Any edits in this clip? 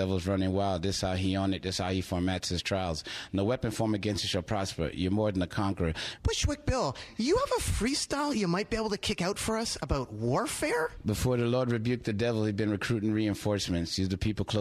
yes; 2 cuts; at 6.2 s, 11.0 s

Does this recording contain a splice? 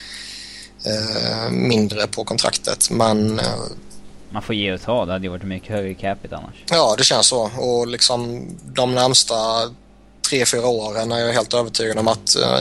no; 0 cuts

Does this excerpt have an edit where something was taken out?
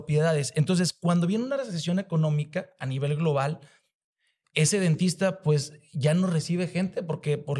no; 0 cuts

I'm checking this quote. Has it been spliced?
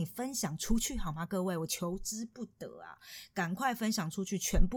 no; 0 cuts

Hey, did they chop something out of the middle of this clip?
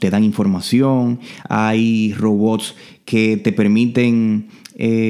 yes; 1 cut; at 1.4 s

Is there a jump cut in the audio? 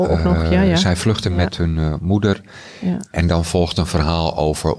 no; 0 cuts

